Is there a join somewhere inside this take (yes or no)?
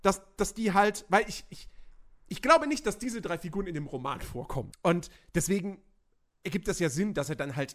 yes